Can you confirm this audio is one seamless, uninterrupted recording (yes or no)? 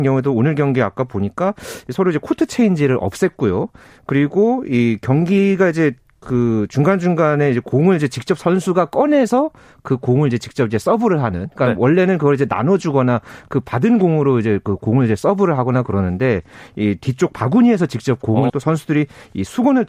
no